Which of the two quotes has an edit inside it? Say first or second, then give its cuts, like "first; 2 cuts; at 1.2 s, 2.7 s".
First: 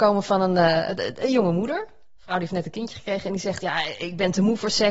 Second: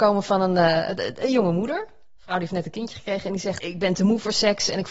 second; 1 cut; at 3.6 s